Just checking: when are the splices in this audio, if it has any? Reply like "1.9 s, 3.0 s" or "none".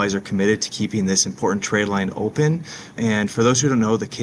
3.0 s